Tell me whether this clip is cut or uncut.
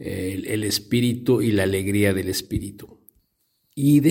uncut